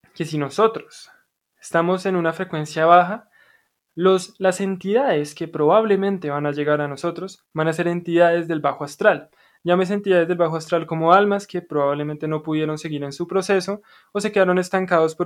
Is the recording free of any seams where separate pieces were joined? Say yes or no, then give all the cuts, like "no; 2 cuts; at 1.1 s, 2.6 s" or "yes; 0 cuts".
yes; 0 cuts